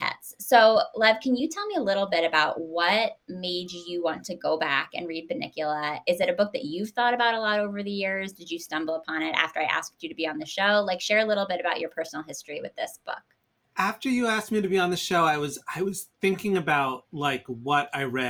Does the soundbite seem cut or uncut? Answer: uncut